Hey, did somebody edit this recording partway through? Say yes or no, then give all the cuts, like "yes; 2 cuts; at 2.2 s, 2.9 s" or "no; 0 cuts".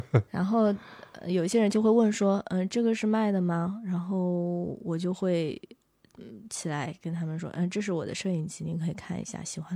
yes; 1 cut; at 7.4 s